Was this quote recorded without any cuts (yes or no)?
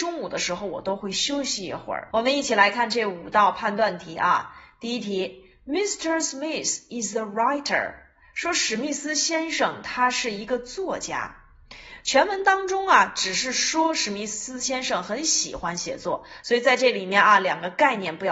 no